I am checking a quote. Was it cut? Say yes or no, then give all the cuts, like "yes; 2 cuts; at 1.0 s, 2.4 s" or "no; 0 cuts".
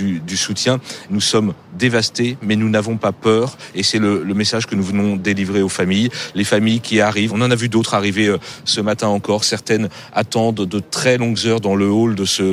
yes; 2 cuts; at 1.1 s, 7.3 s